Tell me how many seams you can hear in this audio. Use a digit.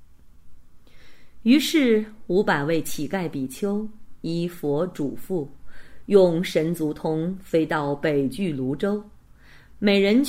0